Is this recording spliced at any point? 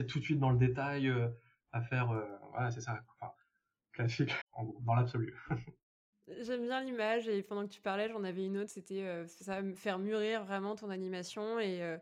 yes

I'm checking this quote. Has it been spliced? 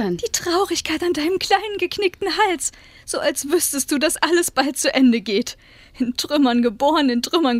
no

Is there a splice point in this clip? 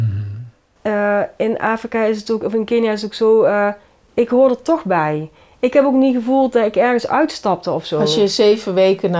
no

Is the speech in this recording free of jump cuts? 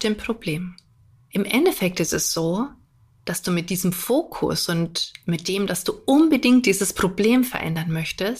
yes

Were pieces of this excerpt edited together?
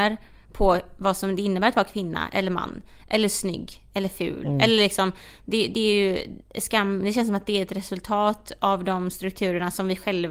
no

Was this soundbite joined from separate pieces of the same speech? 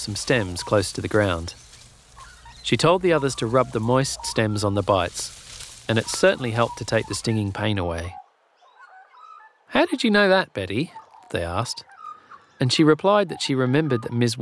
no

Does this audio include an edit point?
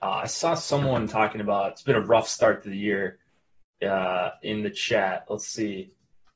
no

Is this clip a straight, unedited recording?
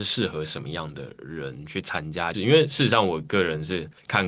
no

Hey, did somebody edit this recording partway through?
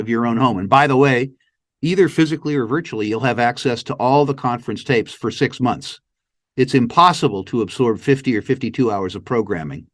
no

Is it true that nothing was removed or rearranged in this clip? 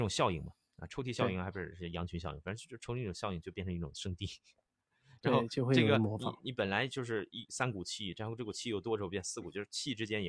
yes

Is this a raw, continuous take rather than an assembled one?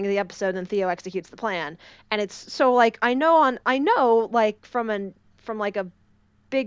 yes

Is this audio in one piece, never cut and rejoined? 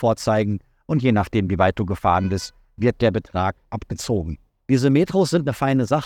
yes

